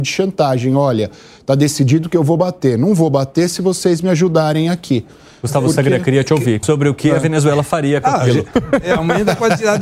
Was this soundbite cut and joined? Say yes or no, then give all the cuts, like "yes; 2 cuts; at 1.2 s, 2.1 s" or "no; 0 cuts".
yes; 2 cuts; at 6.6 s, 8.5 s